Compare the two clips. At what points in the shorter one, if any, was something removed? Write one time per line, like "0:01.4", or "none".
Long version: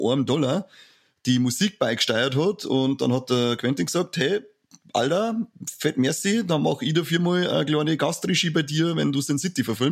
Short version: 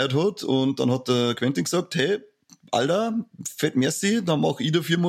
none